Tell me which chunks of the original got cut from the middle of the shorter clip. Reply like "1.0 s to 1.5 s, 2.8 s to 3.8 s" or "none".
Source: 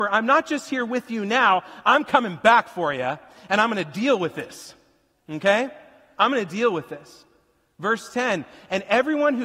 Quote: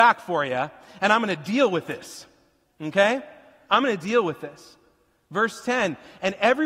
none